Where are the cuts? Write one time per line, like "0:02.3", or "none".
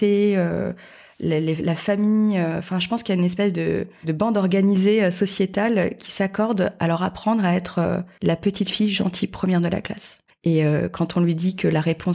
0:04.0
0:10.3